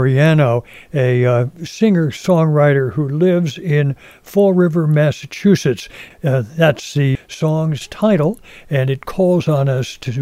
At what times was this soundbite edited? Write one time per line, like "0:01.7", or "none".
0:06.1
0:07.2